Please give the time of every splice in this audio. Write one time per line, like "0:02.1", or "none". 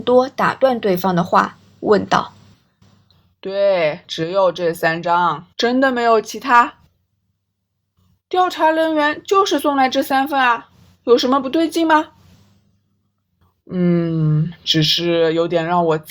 0:05.5